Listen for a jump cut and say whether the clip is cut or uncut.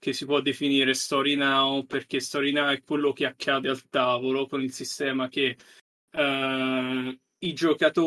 uncut